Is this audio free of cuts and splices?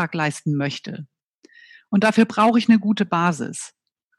yes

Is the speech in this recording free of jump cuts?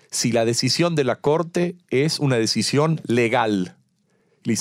yes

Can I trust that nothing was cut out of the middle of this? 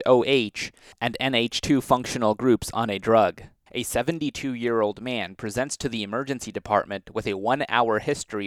no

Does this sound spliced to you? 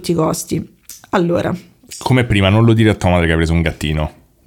no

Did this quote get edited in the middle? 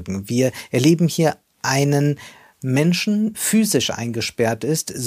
yes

